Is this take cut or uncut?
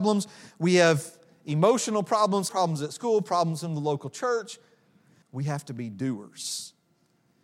cut